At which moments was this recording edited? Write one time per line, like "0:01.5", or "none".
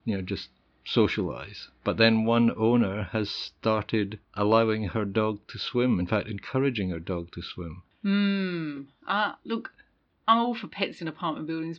none